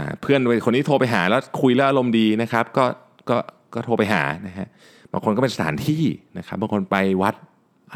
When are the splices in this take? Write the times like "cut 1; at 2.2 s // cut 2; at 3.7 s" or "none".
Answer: none